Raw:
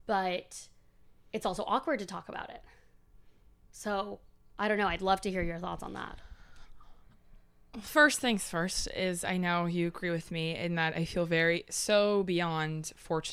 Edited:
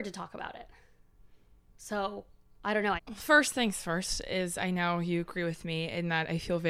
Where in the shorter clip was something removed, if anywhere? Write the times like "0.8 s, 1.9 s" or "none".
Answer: 3.0 s